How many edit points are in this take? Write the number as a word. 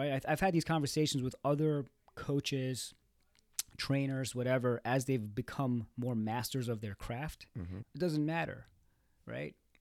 one